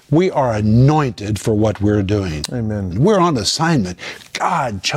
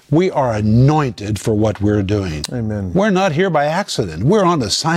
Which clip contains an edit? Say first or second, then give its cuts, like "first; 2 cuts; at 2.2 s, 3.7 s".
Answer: first; 1 cut; at 2.9 s